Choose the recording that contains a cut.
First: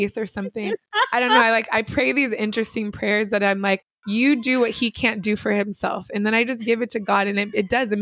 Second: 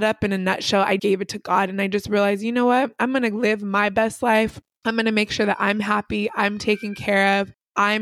second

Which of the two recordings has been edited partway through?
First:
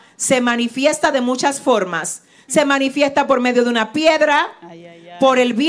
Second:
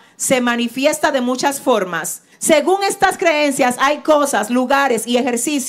second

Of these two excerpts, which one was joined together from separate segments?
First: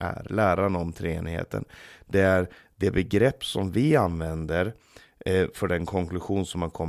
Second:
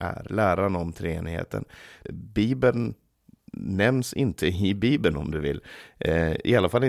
second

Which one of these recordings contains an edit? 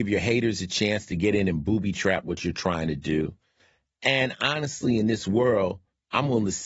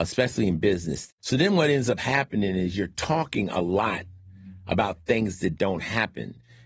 second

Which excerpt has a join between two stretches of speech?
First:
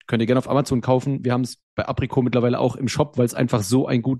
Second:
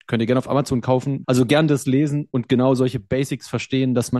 second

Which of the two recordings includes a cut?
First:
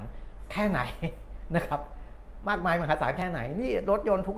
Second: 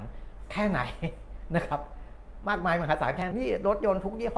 second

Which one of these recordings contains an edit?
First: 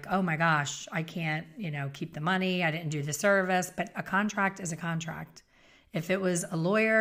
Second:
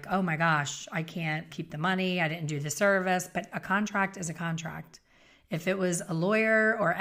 second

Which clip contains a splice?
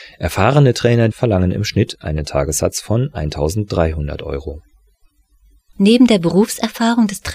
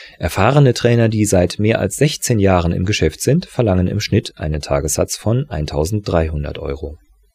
first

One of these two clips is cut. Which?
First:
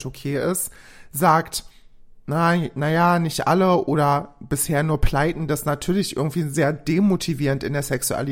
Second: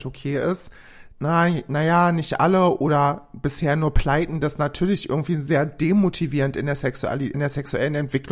second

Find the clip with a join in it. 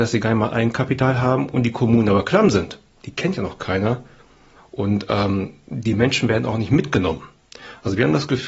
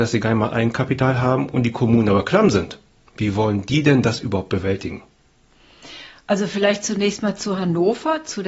first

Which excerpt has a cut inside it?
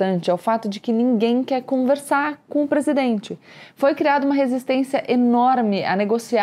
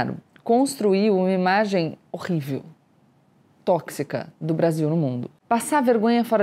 second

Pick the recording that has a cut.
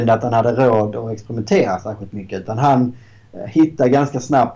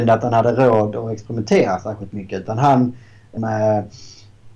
second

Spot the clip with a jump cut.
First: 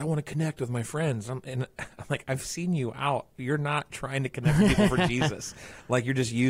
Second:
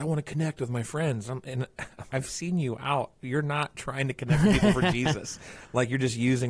second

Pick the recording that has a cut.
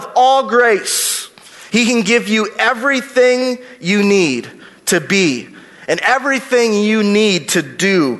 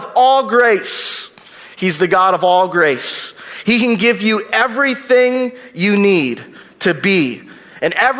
first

